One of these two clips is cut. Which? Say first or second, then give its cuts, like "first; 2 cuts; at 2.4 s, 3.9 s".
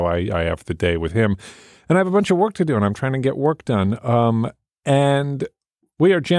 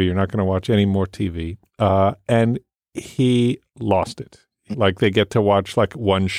second; 1 cut; at 4.7 s